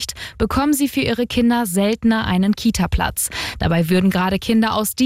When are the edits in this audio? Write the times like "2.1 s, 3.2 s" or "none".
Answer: 3.5 s